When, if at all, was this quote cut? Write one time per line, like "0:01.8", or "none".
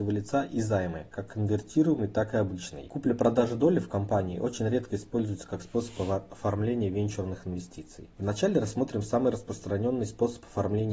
none